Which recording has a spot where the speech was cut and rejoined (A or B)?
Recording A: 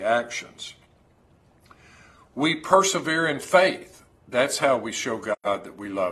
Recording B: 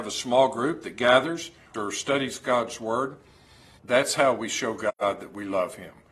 B